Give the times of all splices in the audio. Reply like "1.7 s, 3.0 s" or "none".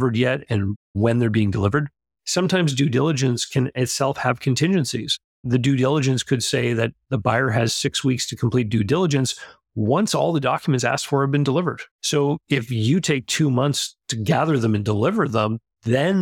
11.9 s